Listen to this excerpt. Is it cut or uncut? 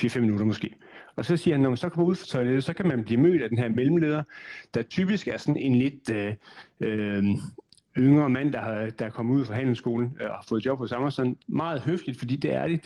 cut